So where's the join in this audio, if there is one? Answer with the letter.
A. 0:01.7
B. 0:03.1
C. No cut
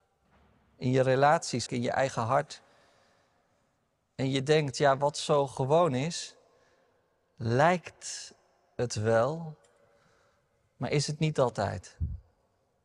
A